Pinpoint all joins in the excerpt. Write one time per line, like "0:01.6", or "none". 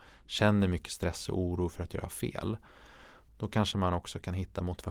0:03.3